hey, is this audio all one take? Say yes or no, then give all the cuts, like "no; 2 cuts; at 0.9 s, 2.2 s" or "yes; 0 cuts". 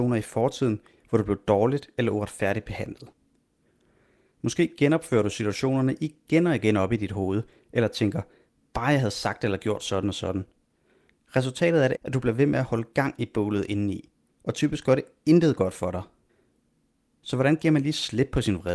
no; 1 cut; at 12.0 s